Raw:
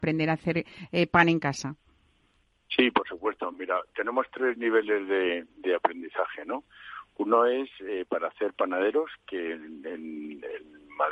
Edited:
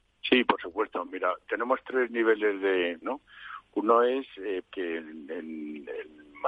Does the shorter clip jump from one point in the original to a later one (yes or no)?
yes